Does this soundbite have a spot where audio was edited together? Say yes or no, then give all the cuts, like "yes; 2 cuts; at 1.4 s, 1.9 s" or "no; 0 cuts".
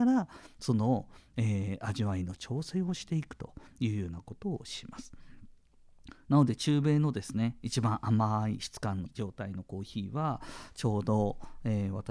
yes; 1 cut; at 9.1 s